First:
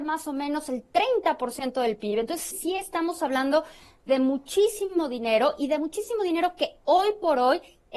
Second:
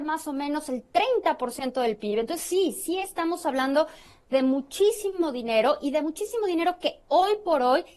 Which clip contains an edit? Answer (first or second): first